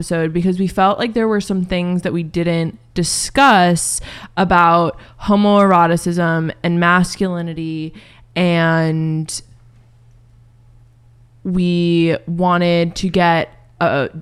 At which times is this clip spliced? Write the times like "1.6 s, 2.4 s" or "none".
none